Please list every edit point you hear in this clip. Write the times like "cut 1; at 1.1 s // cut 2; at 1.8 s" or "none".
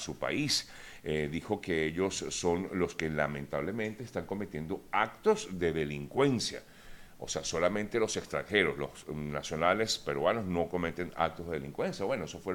none